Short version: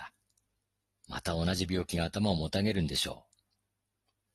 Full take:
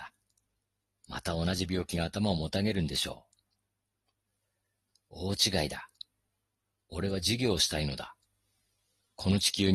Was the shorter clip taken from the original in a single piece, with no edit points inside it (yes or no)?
yes